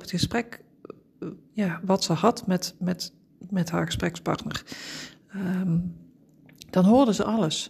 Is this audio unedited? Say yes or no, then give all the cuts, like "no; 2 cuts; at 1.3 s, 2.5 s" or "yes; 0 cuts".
yes; 0 cuts